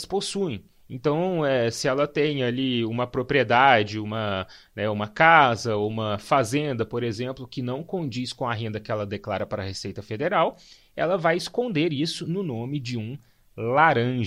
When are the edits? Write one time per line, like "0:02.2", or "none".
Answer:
none